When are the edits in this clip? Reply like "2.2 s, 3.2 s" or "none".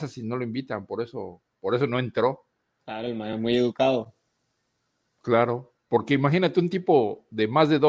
none